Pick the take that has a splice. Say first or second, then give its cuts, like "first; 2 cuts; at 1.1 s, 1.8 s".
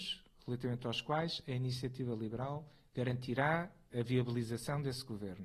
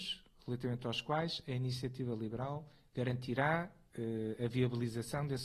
first; 1 cut; at 3.9 s